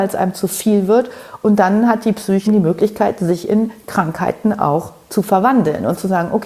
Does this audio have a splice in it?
yes; 1 cut; at 2.5 s

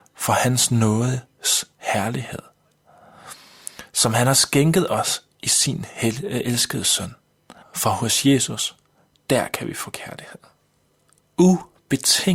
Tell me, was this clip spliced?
yes; 1 cut; at 7.6 s

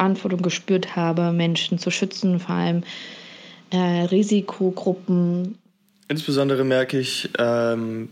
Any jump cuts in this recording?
no; 0 cuts

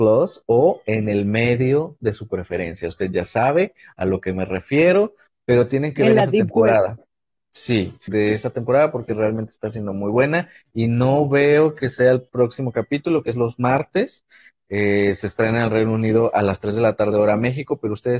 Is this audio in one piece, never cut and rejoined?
no; 1 cut; at 8.1 s

